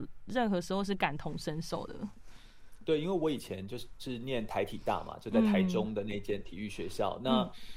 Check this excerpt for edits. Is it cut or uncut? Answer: uncut